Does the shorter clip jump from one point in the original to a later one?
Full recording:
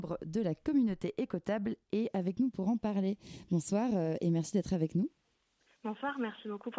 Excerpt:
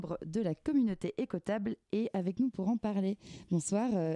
no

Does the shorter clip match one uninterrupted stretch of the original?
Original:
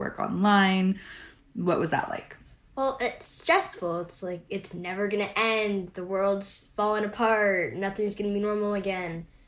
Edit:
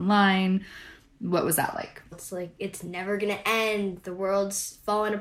no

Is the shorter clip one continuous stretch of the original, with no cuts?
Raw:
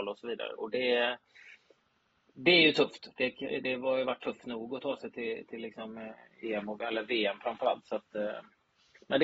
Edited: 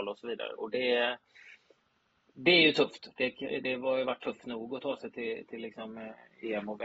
yes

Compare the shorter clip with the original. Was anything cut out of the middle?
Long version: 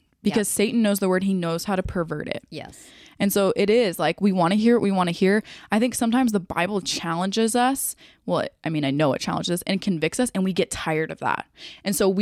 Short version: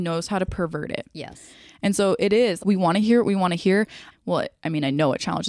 yes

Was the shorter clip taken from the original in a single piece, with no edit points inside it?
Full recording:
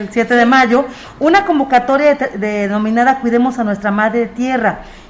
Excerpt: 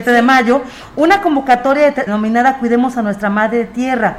no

